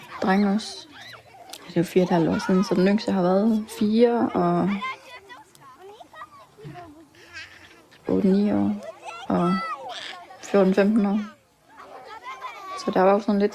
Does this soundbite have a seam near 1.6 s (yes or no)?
no